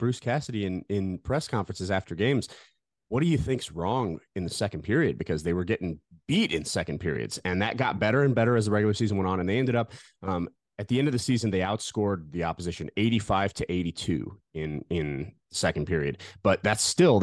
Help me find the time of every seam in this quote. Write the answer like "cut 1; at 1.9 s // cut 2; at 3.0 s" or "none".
none